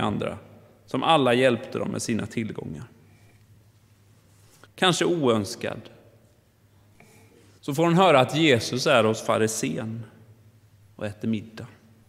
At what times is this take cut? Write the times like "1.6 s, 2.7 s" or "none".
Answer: 4.7 s, 7.6 s